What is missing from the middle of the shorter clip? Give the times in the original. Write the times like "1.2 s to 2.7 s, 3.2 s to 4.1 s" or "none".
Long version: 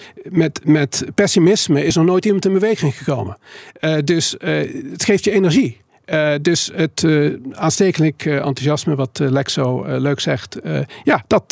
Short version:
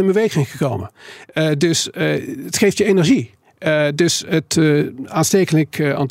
none